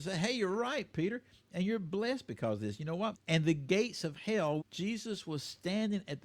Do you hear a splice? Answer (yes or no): yes